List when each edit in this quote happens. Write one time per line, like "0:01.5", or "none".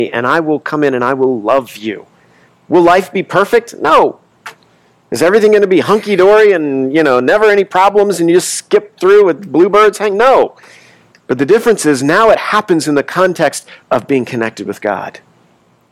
0:11.1
0:13.8